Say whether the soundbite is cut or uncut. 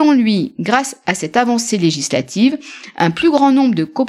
uncut